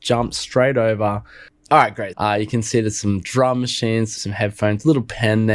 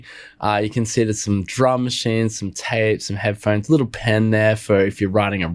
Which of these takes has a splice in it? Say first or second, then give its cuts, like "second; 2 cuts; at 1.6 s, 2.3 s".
first; 2 cuts; at 2.1 s, 4.2 s